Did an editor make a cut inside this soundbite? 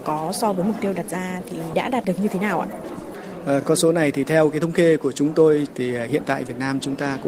no; 0 cuts

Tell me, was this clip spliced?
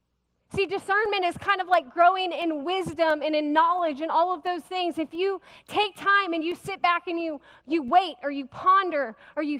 no; 0 cuts

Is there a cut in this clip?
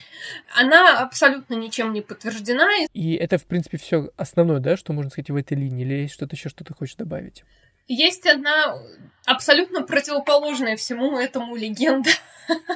yes; 1 cut; at 2.9 s

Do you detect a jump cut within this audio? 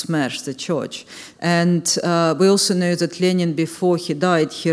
yes; 1 cut; at 1.3 s

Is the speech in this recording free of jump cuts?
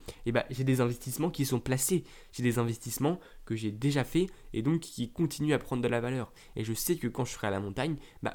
yes; 0 cuts

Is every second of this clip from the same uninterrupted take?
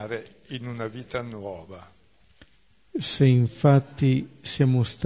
yes; 0 cuts

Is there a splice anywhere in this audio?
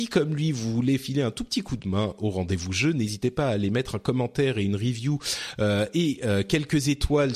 no; 0 cuts

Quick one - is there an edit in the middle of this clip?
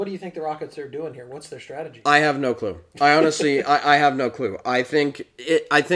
no; 0 cuts

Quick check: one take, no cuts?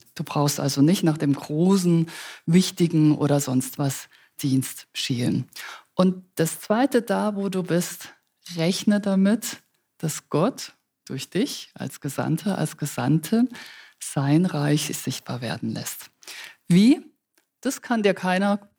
yes; 0 cuts

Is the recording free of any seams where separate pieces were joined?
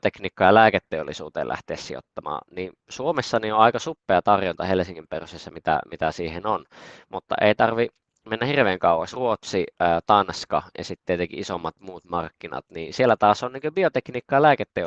yes; 0 cuts

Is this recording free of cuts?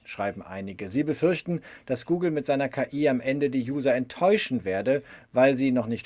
yes; 0 cuts

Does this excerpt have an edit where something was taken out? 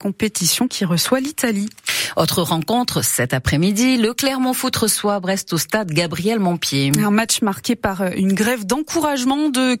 no; 0 cuts

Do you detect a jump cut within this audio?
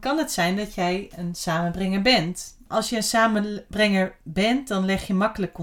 yes; 1 cut; at 2.7 s

